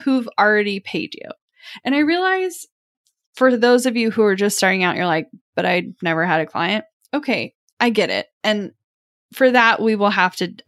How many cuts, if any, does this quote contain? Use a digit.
0